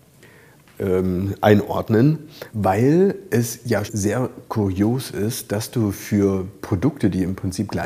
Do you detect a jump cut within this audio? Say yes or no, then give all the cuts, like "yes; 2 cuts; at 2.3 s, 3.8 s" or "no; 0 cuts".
yes; 2 cuts; at 2.5 s, 3.9 s